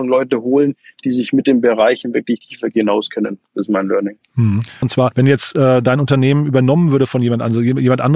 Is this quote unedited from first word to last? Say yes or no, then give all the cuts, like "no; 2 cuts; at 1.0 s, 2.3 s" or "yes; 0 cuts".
no; 1 cut; at 4.8 s